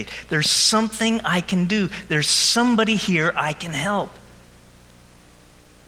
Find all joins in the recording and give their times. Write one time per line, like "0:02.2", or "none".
none